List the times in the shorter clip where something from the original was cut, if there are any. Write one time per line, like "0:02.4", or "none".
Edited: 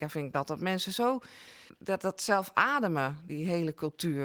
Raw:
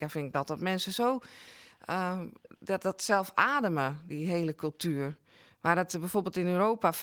0:01.7